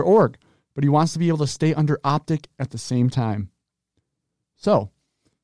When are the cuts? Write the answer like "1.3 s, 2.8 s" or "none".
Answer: none